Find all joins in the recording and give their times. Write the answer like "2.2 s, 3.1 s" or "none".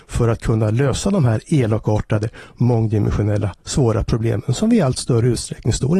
none